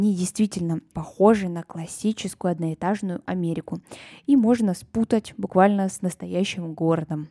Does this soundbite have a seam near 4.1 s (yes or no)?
no